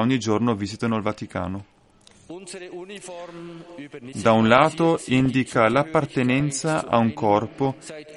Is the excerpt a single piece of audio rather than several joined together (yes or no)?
no